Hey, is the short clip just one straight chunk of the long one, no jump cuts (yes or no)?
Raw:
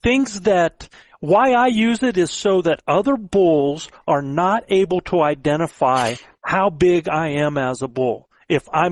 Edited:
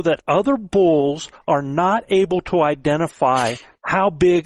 yes